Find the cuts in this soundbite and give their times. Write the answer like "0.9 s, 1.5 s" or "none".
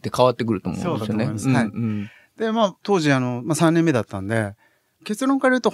none

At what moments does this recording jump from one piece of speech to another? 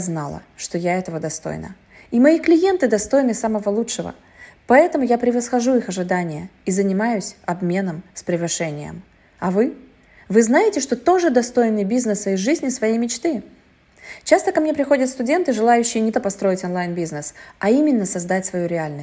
16.1 s

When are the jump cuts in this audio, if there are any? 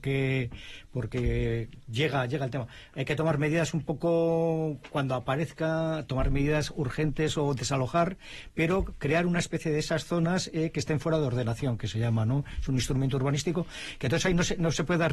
none

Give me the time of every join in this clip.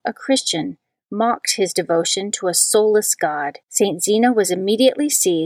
3.6 s

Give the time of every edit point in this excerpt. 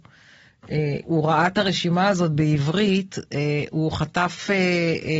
1.0 s

